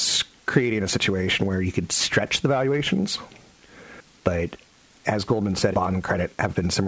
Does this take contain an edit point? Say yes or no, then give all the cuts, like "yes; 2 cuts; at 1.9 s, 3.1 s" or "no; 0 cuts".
yes; 1 cut; at 5.7 s